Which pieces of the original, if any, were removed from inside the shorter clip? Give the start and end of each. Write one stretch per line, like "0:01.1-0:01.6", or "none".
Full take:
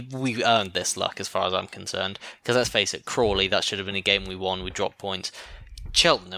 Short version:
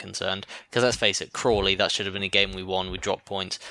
none